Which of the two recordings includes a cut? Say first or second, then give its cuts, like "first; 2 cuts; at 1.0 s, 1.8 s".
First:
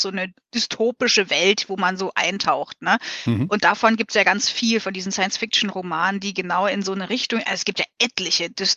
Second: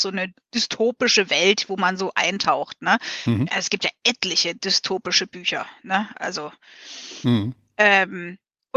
second; 1 cut; at 3.5 s